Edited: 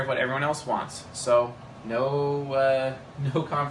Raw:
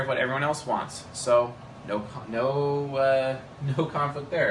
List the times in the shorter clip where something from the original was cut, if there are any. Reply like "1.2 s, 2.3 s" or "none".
1.8 s